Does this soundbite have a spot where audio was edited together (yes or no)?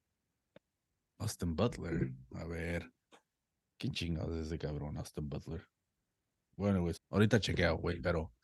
yes